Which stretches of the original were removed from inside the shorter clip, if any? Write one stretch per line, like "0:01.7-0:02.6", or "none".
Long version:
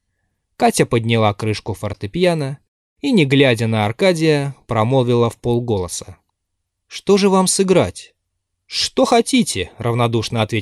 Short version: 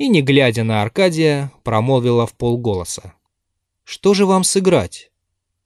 none